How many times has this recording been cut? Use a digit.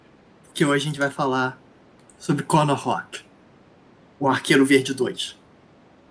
0